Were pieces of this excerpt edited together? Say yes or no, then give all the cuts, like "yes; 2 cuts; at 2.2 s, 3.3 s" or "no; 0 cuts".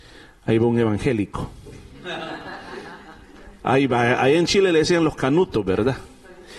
no; 0 cuts